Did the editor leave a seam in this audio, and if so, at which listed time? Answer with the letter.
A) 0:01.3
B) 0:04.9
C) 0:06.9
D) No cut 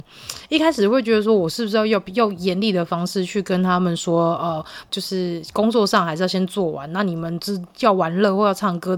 B